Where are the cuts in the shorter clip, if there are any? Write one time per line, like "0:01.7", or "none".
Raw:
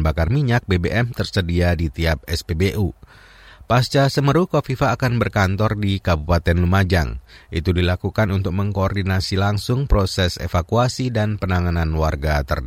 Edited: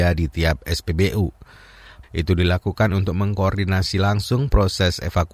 0:02.0